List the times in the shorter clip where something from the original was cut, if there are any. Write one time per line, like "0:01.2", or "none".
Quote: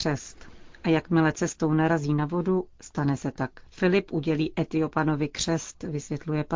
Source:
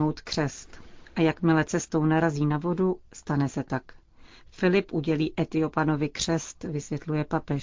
0:03.7